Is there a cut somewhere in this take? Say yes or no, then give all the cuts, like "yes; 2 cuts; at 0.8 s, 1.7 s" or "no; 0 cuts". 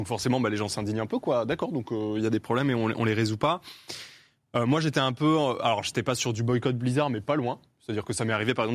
no; 0 cuts